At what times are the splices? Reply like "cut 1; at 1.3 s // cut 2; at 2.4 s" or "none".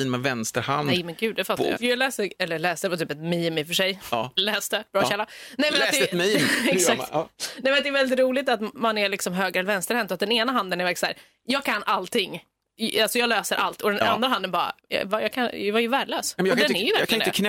cut 1; at 1.7 s // cut 2; at 14.8 s